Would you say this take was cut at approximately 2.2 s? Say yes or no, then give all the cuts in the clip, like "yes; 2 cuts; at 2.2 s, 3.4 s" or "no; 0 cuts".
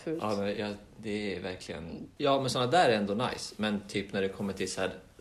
yes; 1 cut; at 2.2 s